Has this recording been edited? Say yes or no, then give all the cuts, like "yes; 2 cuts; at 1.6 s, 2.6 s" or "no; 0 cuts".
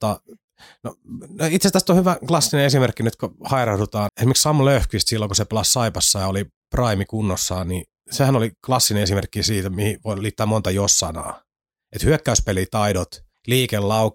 yes; 1 cut; at 4.1 s